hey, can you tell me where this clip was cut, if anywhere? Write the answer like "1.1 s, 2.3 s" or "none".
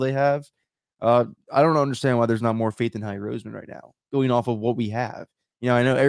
none